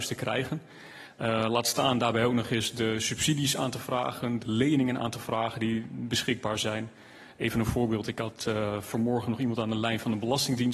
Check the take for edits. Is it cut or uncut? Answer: uncut